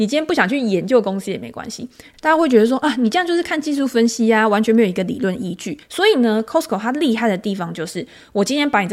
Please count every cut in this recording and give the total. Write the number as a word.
two